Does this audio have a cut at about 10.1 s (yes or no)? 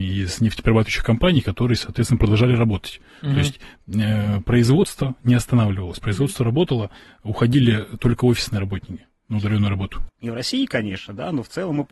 yes